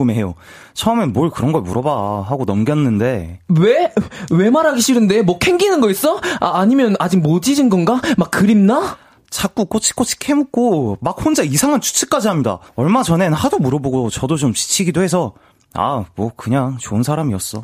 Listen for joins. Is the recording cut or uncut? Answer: cut